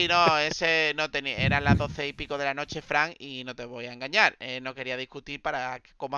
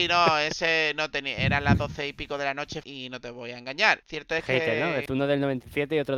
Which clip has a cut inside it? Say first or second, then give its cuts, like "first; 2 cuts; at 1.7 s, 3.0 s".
second; 3 cuts; at 2.8 s, 4.0 s, 5.1 s